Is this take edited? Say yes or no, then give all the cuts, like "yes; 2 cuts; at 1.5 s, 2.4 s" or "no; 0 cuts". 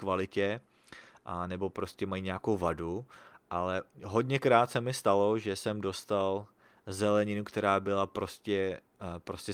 no; 0 cuts